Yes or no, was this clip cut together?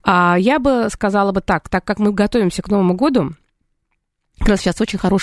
no